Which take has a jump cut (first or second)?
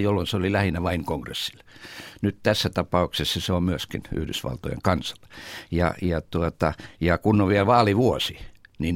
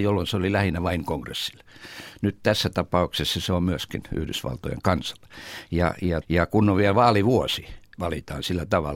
second